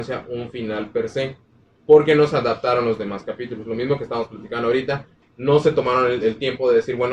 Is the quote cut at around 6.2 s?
yes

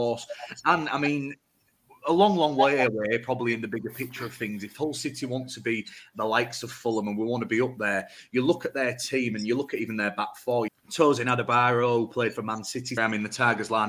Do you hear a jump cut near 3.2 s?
no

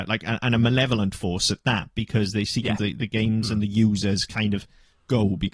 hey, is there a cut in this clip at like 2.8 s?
yes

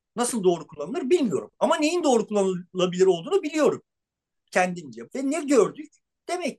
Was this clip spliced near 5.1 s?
yes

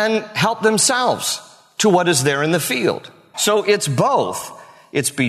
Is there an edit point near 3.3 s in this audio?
yes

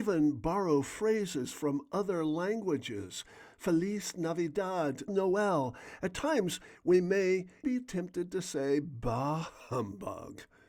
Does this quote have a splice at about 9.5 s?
no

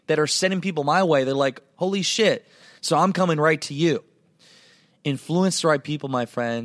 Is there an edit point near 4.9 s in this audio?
no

